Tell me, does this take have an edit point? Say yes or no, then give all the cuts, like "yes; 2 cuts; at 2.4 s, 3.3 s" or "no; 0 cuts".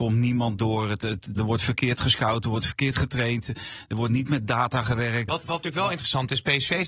yes; 2 cuts; at 1.4 s, 5.3 s